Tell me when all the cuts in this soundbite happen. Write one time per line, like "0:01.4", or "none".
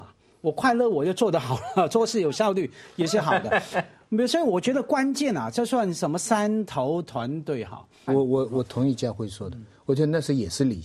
0:08.1